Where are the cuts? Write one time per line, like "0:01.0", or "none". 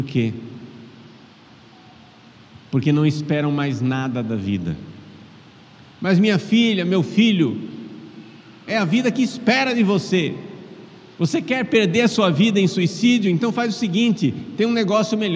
0:08.7